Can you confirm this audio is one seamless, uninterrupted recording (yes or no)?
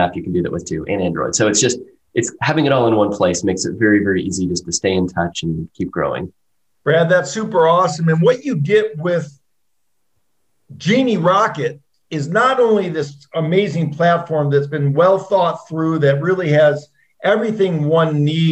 yes